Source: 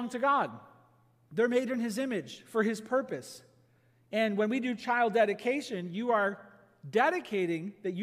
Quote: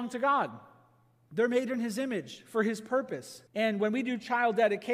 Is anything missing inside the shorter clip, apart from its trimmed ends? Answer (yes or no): yes